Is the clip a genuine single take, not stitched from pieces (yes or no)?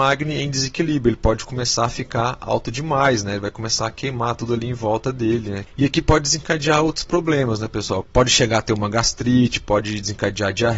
no